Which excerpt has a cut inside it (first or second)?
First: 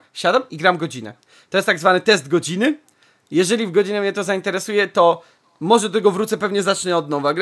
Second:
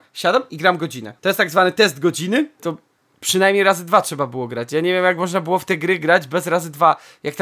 second